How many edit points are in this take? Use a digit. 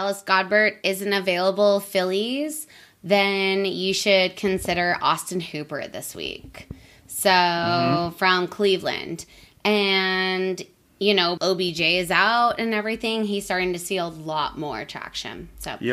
1